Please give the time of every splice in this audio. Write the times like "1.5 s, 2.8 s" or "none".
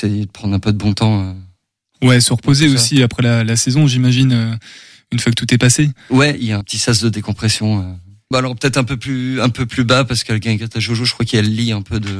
6.6 s, 8.3 s